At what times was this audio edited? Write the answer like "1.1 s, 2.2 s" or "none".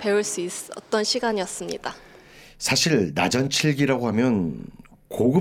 none